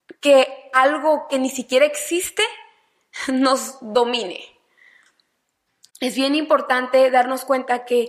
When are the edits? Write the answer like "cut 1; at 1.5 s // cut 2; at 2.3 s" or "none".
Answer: none